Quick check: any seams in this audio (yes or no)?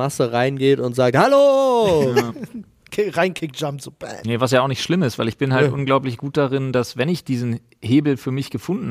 no